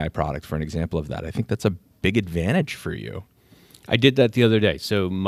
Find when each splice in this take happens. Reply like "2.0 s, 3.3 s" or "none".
none

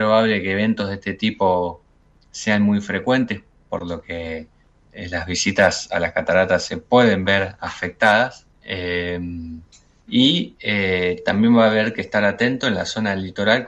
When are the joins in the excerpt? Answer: 8.5 s

